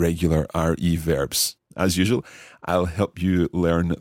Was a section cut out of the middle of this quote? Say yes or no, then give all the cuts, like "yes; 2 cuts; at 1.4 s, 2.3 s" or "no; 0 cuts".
yes; 1 cut; at 1.6 s